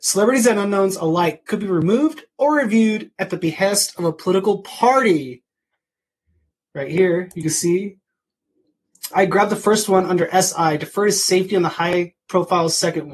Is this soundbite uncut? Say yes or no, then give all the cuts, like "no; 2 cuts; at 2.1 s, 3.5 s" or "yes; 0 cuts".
no; 1 cut; at 9.1 s